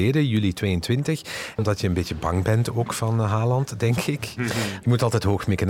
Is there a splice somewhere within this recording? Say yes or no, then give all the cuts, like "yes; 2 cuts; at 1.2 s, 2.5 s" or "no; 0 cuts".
yes; 2 cuts; at 1.5 s, 4.4 s